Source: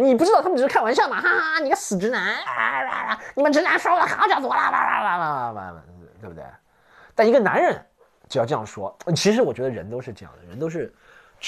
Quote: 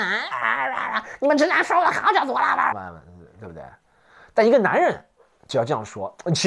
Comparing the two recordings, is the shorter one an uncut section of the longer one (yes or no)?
no